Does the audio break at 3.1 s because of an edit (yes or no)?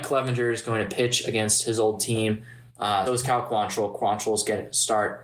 yes